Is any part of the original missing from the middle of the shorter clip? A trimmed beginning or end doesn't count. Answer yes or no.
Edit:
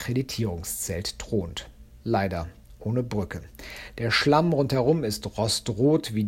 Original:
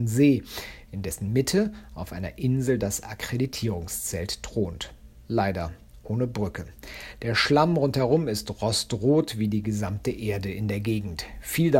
no